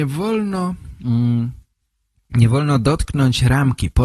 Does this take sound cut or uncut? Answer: uncut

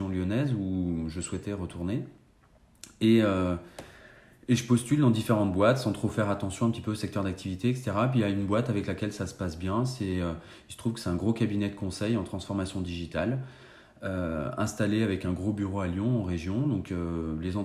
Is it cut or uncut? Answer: uncut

